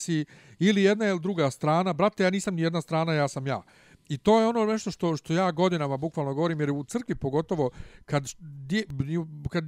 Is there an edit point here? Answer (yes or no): no